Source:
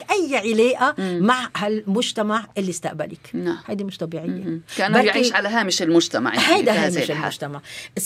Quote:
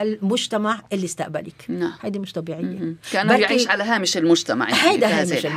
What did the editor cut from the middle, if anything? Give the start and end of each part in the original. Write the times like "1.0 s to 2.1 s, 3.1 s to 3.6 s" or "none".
none